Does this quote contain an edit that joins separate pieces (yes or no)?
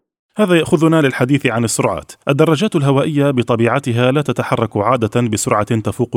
no